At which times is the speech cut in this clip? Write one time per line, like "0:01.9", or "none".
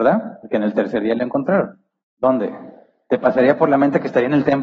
0:02.0